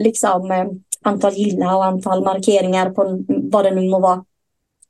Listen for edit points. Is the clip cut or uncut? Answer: cut